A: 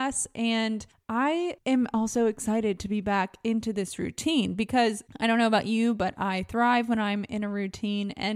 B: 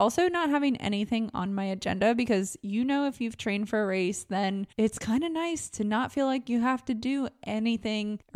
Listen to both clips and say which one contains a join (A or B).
B